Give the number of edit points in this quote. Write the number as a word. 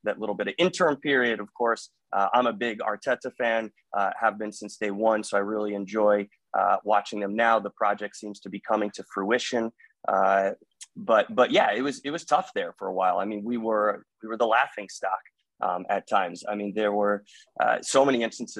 zero